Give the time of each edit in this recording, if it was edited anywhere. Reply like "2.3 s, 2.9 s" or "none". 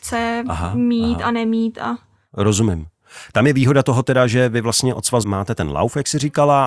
5.2 s